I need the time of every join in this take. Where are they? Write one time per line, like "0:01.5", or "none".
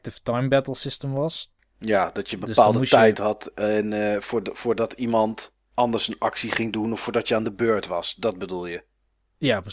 none